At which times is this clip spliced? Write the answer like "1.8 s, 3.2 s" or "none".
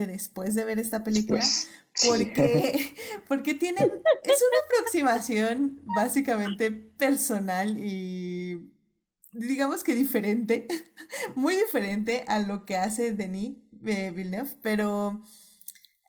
none